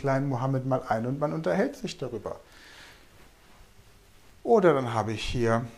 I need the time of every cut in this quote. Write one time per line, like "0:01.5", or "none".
none